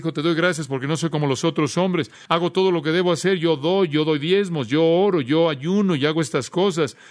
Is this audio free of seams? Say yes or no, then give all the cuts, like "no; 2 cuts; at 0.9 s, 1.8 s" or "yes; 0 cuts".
yes; 0 cuts